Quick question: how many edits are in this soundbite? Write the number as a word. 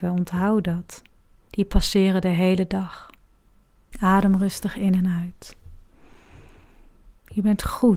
two